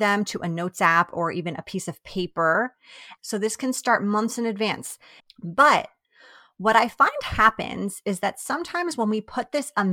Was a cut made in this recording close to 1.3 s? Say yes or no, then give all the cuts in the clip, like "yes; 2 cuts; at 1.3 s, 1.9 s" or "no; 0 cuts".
no; 2 cuts; at 3.2 s, 5.2 s